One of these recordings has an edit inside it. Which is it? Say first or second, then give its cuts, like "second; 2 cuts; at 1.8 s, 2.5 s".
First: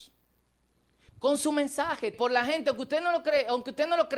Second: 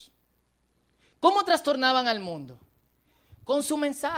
first; 2 cuts; at 1.1 s, 2.1 s